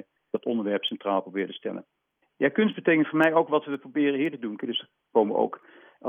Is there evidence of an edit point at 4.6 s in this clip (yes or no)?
yes